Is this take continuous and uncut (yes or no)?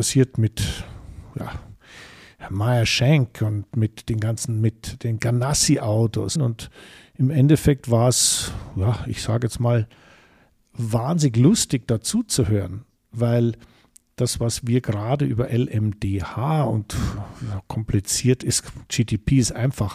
no